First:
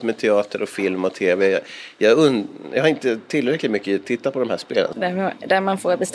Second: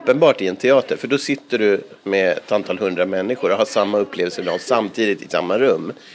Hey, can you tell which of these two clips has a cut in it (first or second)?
first